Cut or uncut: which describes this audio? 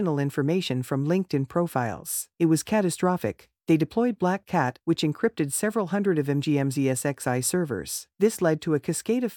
cut